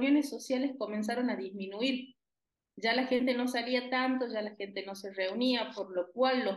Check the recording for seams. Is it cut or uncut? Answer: uncut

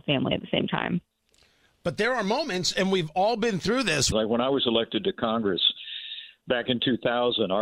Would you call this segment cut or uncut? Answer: cut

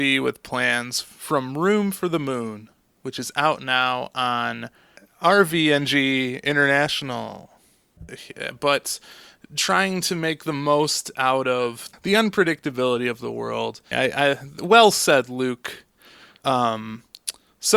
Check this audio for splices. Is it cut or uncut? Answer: cut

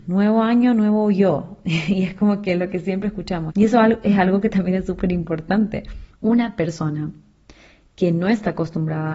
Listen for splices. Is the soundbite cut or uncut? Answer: cut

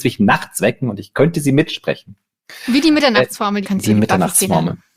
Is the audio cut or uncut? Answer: cut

